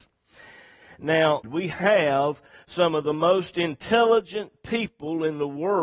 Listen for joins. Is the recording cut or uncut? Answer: cut